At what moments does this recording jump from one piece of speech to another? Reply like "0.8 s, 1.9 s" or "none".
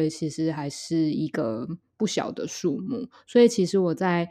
none